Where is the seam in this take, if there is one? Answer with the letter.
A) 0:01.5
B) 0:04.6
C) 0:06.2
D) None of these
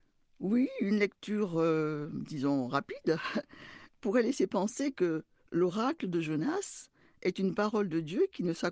D